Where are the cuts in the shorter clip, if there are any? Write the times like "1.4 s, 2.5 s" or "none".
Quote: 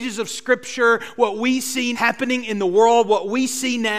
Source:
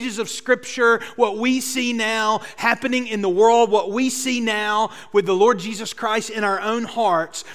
1.9 s